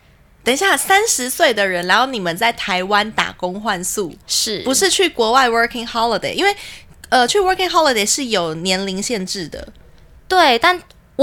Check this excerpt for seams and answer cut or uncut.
uncut